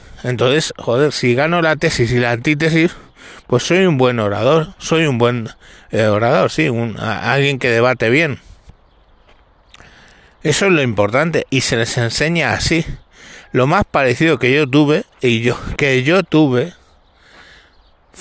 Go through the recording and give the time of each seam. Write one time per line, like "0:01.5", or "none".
0:13.5